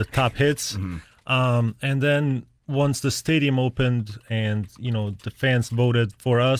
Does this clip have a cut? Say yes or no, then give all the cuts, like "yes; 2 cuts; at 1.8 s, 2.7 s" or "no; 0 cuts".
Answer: yes; 1 cut; at 2.6 s